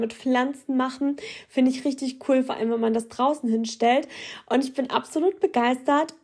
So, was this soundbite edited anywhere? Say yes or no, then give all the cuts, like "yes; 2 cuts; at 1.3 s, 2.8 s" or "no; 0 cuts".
no; 0 cuts